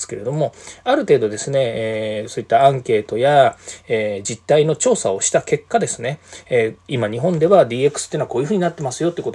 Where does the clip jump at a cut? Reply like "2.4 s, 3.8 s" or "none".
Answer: none